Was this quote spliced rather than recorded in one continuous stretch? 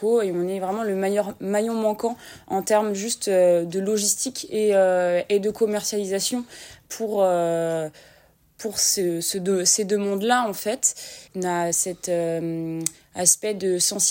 yes; 1 cut; at 11.3 s

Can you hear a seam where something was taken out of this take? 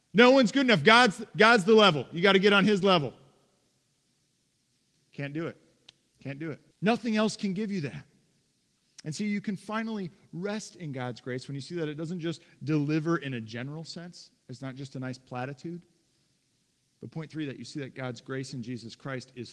yes; 1 cut; at 6.7 s

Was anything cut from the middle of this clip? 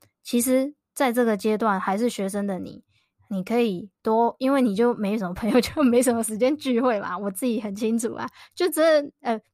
no; 0 cuts

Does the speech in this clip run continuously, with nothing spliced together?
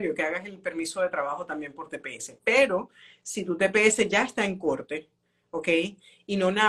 yes; 0 cuts

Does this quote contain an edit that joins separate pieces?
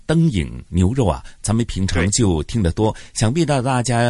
no; 0 cuts

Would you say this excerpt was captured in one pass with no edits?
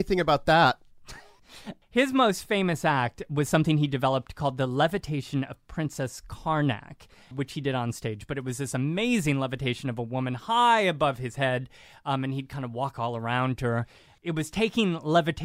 no; 1 cut; at 7.3 s

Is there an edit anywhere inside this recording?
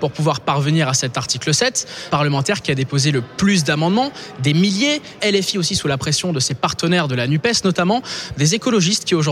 yes; 2 cuts; at 2.1 s, 5.2 s

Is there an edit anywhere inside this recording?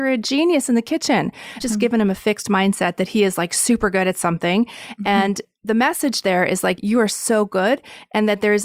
yes; 2 cuts; at 1.6 s, 6.8 s

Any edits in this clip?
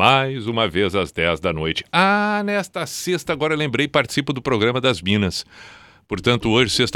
no; 0 cuts

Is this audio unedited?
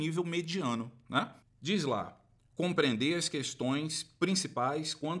no; 1 cut; at 1.4 s

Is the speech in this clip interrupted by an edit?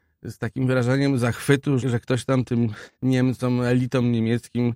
yes; 2 cuts; at 1.8 s, 2.9 s

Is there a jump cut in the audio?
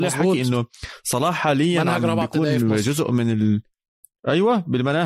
no; 0 cuts

